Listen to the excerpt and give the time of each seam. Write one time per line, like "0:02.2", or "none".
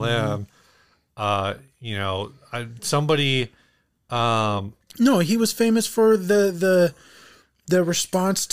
none